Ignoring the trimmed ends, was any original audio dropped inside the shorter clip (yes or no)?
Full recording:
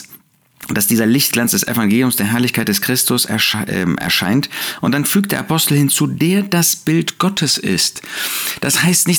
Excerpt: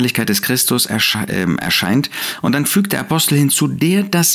no